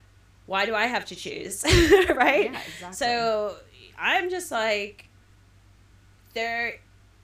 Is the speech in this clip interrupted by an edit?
no; 0 cuts

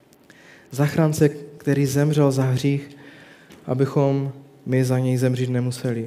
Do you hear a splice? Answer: no; 0 cuts

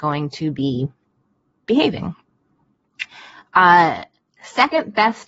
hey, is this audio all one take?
yes; 0 cuts

